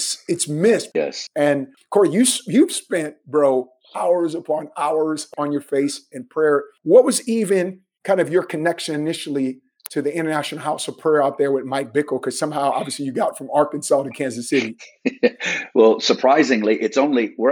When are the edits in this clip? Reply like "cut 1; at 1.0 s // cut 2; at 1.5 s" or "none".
none